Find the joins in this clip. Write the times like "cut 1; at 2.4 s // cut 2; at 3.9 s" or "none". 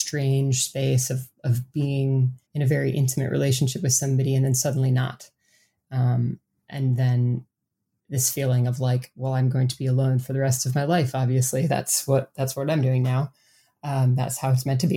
cut 1; at 2.4 s